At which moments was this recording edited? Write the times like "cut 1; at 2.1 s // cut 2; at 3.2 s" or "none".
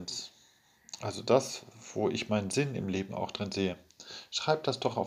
none